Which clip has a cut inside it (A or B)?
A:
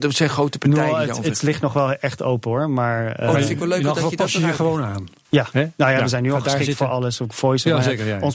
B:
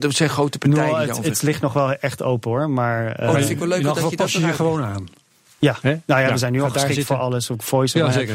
A